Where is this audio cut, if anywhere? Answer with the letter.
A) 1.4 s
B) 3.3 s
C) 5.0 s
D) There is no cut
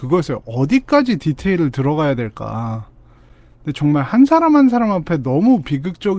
D